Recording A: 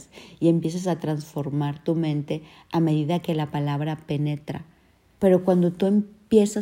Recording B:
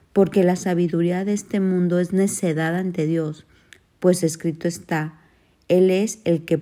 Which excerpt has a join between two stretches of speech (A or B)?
A